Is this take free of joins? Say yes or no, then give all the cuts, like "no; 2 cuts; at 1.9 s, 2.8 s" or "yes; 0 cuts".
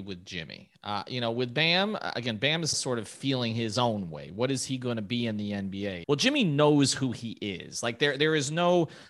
no; 2 cuts; at 2.7 s, 6.0 s